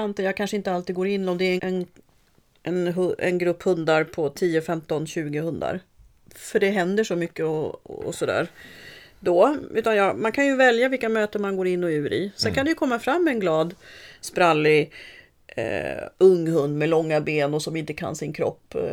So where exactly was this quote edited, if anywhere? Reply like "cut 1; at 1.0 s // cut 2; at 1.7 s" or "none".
cut 1; at 1.6 s